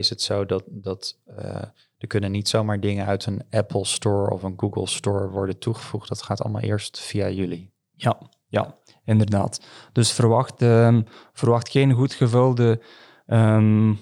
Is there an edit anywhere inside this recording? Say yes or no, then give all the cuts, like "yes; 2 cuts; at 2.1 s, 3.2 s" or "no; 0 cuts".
no; 0 cuts